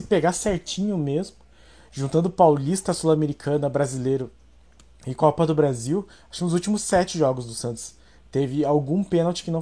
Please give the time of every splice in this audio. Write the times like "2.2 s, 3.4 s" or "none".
none